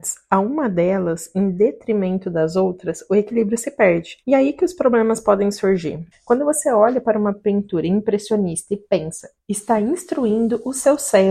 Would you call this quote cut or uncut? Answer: cut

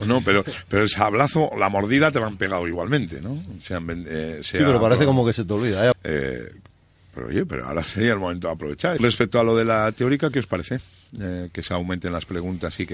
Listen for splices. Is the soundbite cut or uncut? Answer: cut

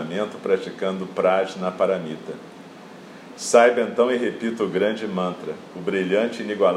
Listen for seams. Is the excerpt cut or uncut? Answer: uncut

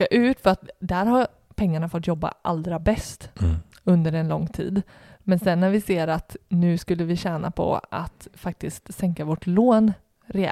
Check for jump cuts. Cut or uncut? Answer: uncut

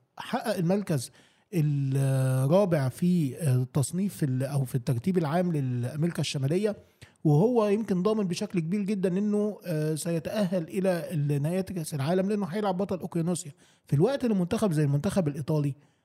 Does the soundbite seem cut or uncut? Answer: uncut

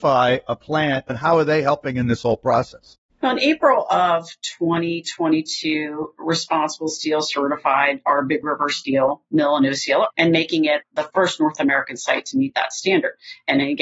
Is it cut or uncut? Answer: cut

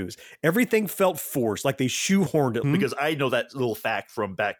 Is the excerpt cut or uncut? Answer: cut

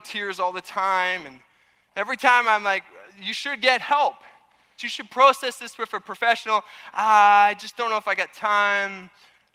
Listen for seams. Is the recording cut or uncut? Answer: cut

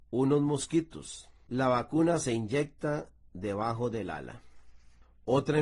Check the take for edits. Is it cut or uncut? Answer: cut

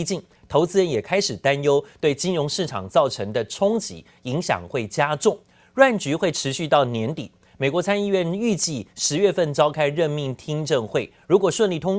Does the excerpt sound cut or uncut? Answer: uncut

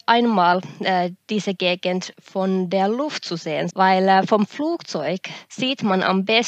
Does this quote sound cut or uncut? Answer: cut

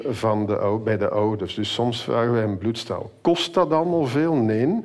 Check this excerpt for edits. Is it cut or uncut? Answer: uncut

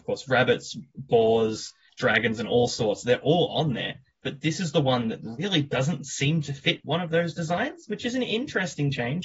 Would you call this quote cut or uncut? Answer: cut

